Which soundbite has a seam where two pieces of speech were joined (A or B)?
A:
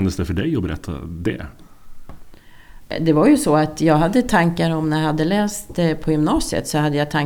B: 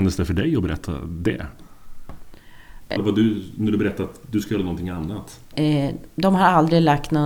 B